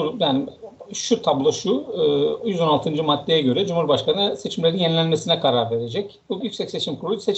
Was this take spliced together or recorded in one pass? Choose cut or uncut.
cut